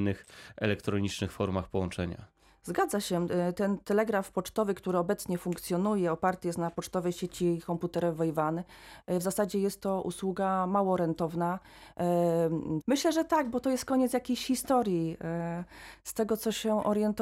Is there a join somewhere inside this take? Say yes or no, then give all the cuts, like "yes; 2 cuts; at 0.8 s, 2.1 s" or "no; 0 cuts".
yes; 1 cut; at 12.8 s